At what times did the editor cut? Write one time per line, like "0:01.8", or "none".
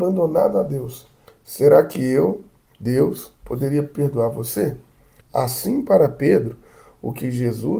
0:01.3
0:05.2